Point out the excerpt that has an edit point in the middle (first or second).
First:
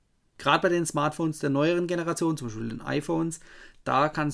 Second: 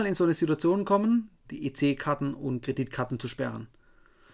second